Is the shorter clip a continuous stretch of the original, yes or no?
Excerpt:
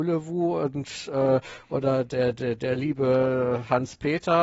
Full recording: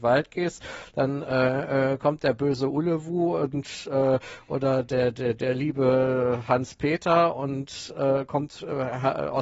yes